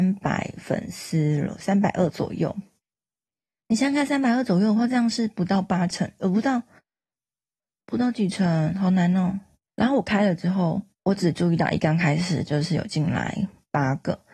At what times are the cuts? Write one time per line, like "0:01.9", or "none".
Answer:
0:09.7
0:10.9